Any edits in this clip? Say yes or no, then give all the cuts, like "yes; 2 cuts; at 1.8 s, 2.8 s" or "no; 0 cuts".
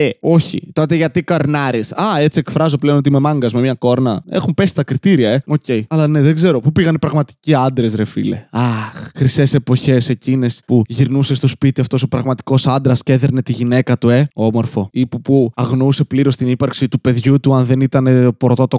no; 0 cuts